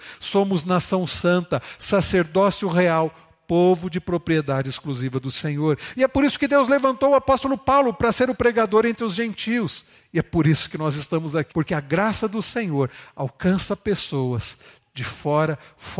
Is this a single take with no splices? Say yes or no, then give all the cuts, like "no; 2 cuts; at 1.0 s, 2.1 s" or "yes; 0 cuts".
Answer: no; 1 cut; at 11.5 s